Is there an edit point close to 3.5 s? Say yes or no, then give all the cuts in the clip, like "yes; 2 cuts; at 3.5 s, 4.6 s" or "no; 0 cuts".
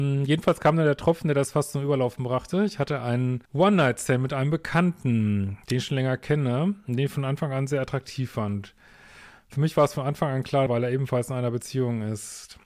yes; 2 cuts; at 3.5 s, 10.7 s